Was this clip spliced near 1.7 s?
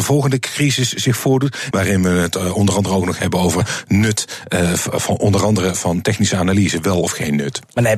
yes; 1 cut; at 1.7 s

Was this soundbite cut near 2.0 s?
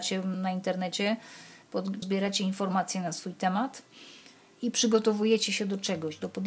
yes; 1 cut; at 2.0 s

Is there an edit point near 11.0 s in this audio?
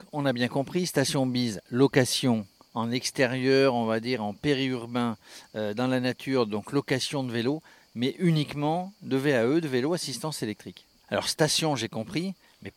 yes; 1 cut; at 11.0 s

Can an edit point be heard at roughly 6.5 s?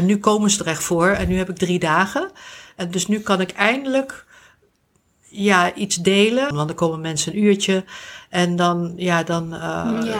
yes; 1 cut; at 6.5 s

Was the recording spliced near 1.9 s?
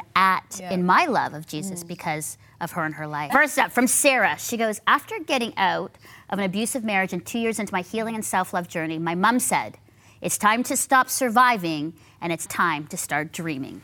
no; 2 cuts; at 3.3 s, 12.5 s

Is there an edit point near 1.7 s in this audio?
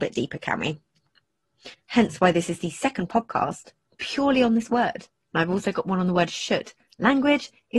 yes; 1 cut; at 1.7 s

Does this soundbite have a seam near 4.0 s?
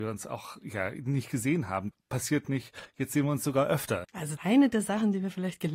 yes; 2 cuts; at 1.9 s, 4.0 s

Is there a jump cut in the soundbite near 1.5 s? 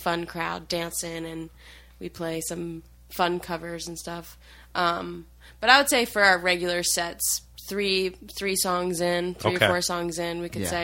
no; 0 cuts

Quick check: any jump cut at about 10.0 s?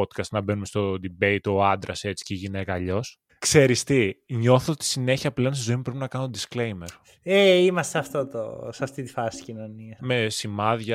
yes; 2 cuts; at 3.3 s, 10.0 s

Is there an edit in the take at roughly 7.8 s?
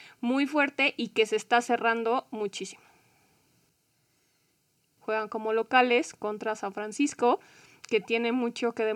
no; 1 cut; at 5.0 s

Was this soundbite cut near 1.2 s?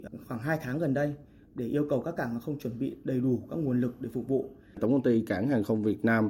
no; 1 cut; at 4.7 s

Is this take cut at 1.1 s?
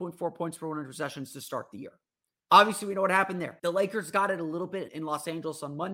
no; 3 cuts; at 2.4 s, 3.6 s, 4.9 s

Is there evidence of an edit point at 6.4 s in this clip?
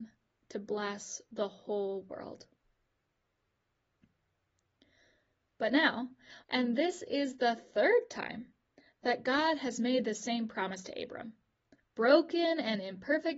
yes; 1 cut; at 6.4 s

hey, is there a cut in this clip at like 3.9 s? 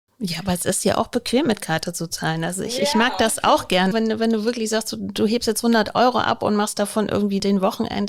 yes; 1 cut; at 3.9 s

